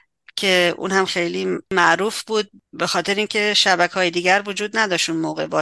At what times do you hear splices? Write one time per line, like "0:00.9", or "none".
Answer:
0:01.1